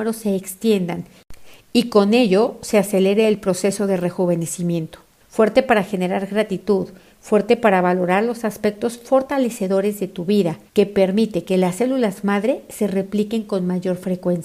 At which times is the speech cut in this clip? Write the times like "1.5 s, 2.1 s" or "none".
5.2 s, 10.7 s